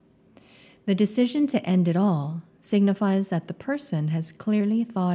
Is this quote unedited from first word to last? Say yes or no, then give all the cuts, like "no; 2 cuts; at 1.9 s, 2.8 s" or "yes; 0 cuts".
yes; 0 cuts